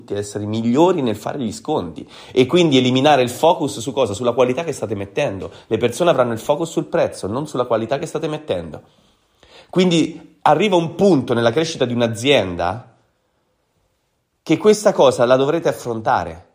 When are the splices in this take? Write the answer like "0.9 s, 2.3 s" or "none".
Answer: none